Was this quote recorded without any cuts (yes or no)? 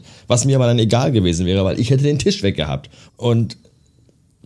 no